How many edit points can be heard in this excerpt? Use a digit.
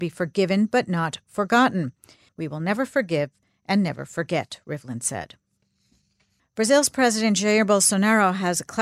2